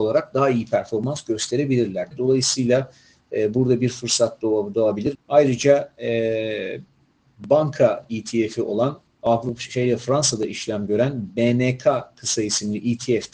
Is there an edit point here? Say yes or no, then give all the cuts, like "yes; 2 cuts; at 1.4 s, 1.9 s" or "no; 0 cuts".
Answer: yes; 2 cuts; at 2.1 s, 5.1 s